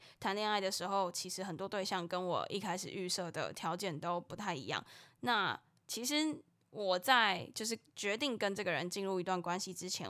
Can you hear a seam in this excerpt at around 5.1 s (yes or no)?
no